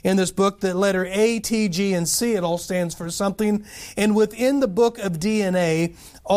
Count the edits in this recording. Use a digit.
0